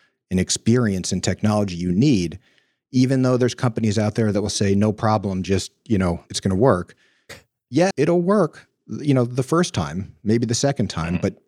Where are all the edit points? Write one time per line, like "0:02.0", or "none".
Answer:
0:06.3
0:07.9